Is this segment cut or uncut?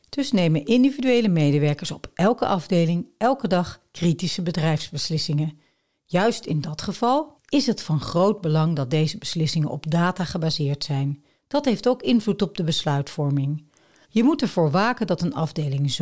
cut